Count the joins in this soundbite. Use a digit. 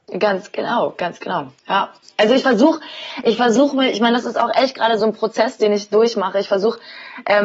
2